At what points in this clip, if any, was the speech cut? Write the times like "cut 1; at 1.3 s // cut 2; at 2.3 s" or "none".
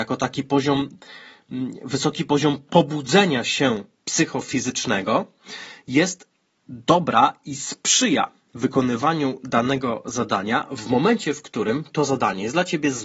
none